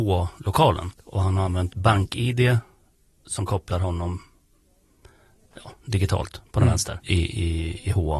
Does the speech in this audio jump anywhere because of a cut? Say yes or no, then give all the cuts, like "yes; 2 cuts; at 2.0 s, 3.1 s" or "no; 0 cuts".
yes; 2 cuts; at 0.9 s, 7.0 s